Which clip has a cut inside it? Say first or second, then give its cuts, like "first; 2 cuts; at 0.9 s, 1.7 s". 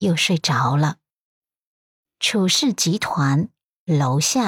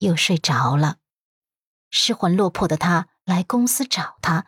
second; 1 cut; at 1.8 s